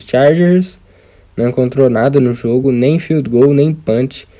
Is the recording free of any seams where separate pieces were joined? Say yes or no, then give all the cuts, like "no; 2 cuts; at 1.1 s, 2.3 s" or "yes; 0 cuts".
yes; 0 cuts